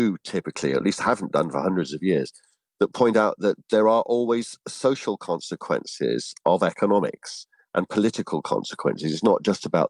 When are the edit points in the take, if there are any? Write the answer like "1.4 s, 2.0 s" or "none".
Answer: none